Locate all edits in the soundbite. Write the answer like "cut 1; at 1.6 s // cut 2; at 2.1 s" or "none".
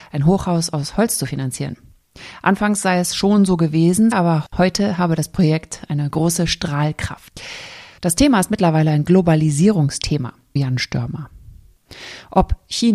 cut 1; at 4.1 s // cut 2; at 7.9 s // cut 3; at 10.6 s